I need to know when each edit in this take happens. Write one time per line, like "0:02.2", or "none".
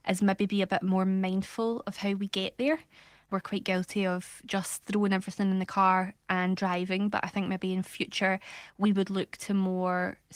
none